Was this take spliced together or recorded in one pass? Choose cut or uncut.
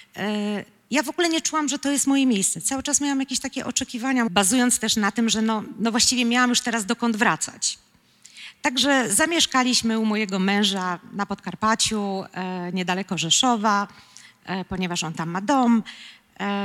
cut